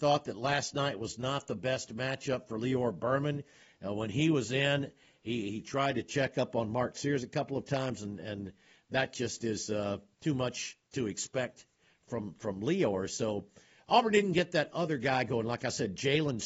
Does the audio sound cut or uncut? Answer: uncut